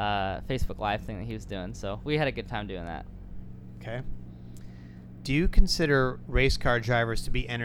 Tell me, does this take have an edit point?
no; 0 cuts

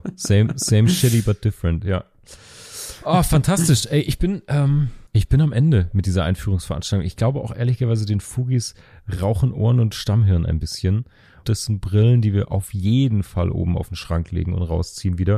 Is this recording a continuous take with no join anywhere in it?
no; 2 cuts; at 5.1 s, 11.4 s

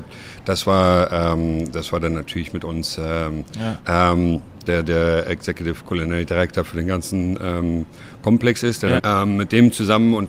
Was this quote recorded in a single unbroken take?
no; 2 cuts; at 3.8 s, 9.0 s

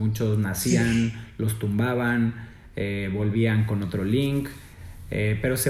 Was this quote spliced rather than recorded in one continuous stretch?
no; 0 cuts

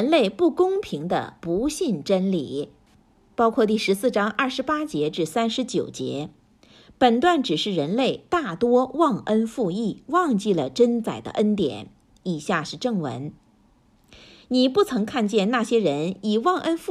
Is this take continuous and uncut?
yes; 0 cuts

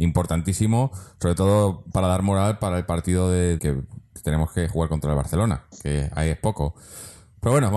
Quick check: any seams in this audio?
yes; 1 cut; at 3.6 s

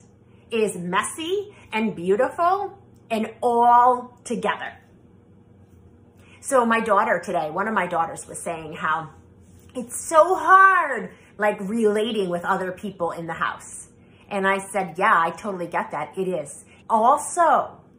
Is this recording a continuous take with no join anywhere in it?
no; 1 cut; at 16.8 s

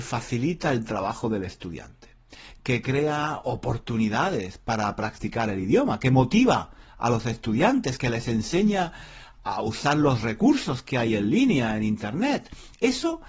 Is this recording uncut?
yes; 0 cuts

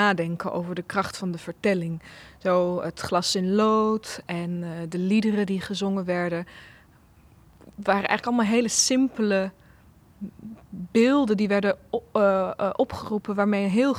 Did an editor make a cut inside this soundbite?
no; 0 cuts

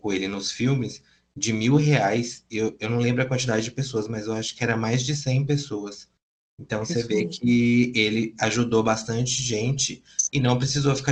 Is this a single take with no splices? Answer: yes; 0 cuts

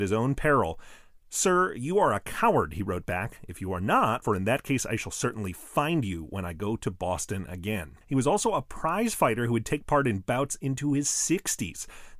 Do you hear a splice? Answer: yes; 2 cuts; at 4.2 s, 8.0 s

